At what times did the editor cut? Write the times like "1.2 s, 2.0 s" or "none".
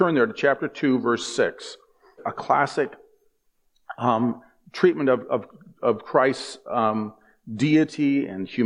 2.2 s